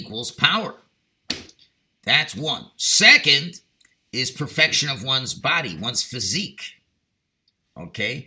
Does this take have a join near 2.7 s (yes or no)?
no